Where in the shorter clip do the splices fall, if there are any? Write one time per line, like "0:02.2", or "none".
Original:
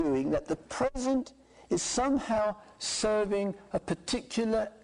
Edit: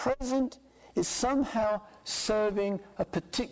none